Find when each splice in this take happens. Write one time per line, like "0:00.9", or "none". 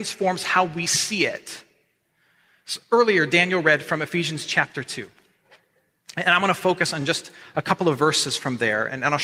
none